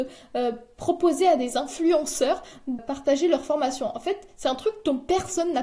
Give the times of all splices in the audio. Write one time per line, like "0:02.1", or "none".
0:02.8